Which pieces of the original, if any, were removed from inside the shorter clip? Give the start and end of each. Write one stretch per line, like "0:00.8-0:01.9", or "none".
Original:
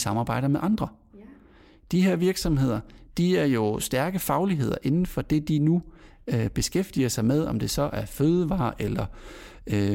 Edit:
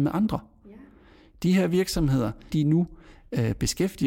0:03.0-0:05.5